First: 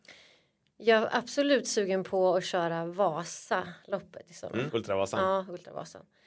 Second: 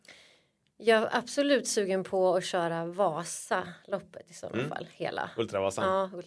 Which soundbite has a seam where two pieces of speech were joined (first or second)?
first